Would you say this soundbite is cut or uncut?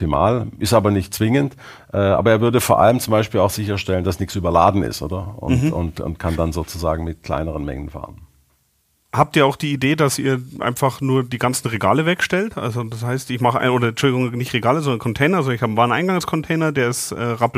uncut